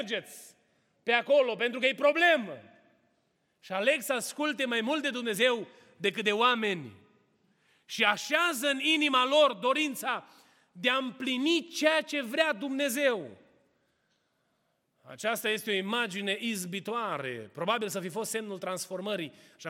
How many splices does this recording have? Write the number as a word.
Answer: zero